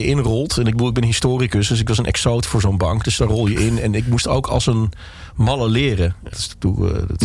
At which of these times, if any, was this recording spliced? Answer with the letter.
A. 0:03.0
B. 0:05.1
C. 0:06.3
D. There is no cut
C